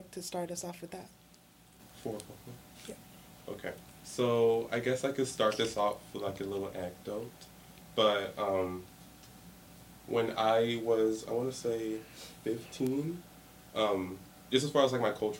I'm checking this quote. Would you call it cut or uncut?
uncut